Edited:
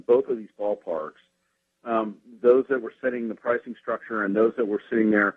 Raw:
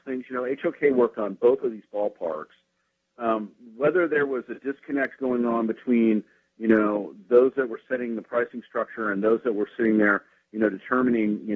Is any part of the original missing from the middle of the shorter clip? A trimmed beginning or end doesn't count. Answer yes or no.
yes